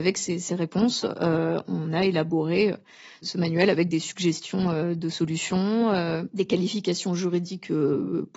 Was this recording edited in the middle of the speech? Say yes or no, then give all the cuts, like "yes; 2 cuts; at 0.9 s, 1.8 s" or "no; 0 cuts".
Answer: no; 0 cuts